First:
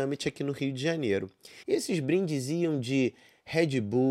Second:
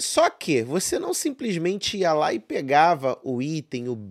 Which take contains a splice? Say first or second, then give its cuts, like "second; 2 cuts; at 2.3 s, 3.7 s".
first; 1 cut; at 1.6 s